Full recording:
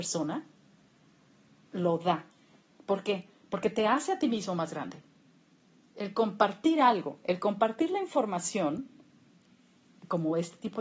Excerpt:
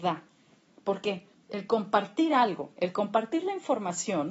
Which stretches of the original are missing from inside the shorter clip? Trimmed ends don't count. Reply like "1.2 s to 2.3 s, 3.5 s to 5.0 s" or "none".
3.4 s to 5.8 s